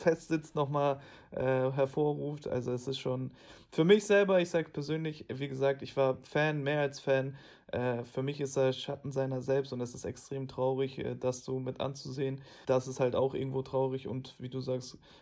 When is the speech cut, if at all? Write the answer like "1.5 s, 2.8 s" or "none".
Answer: 12.6 s